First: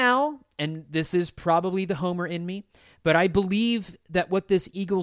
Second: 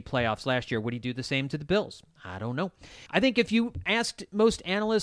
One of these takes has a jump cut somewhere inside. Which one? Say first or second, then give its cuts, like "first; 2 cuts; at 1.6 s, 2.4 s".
second; 1 cut; at 3.1 s